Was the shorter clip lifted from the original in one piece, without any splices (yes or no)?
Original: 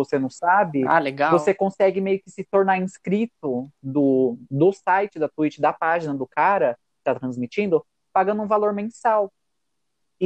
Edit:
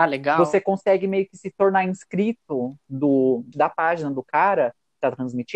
no